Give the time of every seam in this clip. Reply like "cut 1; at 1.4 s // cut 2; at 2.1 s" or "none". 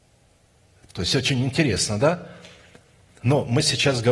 none